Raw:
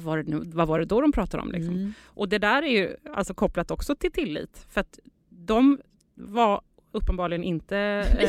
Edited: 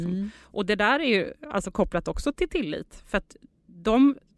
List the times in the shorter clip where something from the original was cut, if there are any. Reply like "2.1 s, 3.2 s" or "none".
none